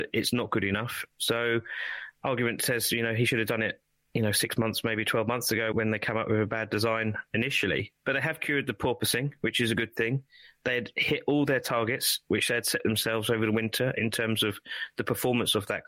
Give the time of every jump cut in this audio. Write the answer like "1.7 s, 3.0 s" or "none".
1.1 s, 5.7 s